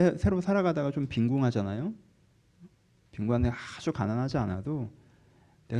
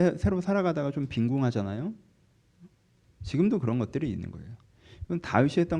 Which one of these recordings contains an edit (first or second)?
second